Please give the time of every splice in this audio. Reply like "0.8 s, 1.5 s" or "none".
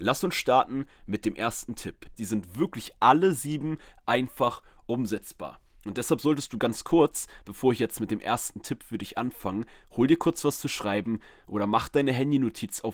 2.2 s